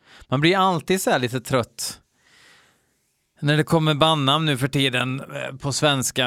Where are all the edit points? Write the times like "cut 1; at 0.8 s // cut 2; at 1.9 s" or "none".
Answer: none

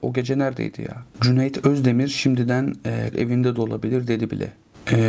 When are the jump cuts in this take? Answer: cut 1; at 3.1 s

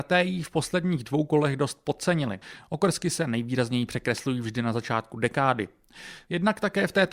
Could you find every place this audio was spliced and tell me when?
none

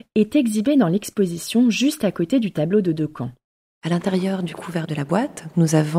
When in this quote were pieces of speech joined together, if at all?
none

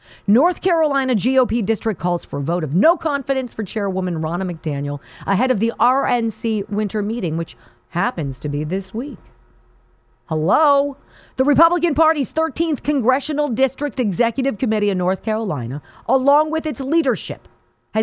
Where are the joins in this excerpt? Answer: none

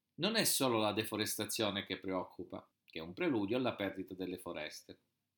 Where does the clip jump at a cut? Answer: cut 1; at 2.7 s

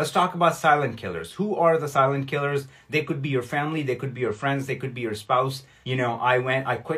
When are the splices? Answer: cut 1; at 5.8 s

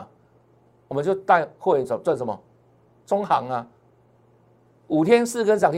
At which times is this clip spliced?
none

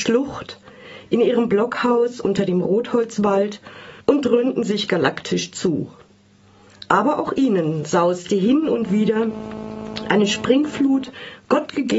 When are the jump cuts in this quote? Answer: cut 1; at 4.0 s

